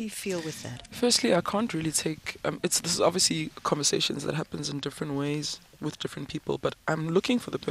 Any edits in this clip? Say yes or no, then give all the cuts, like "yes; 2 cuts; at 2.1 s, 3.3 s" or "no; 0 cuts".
no; 0 cuts